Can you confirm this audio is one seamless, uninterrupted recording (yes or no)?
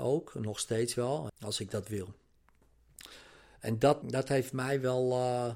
no